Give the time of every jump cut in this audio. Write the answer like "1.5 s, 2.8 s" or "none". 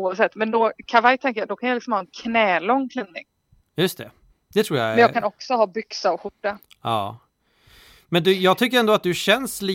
none